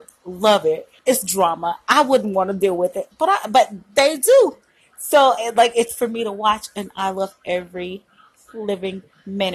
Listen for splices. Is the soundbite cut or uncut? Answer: cut